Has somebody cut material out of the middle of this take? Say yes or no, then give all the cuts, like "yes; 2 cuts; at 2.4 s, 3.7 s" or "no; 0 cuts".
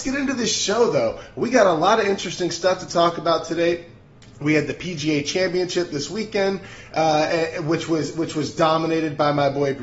no; 0 cuts